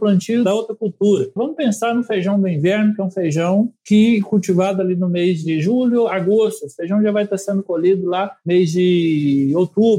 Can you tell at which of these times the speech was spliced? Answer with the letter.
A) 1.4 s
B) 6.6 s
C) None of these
A